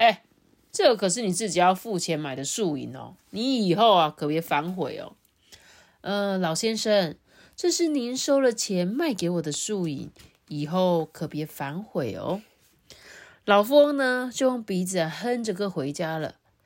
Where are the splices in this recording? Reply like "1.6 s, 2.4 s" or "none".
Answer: none